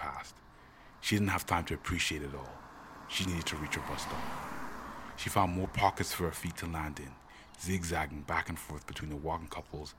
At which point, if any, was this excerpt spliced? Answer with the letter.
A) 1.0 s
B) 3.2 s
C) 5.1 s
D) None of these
B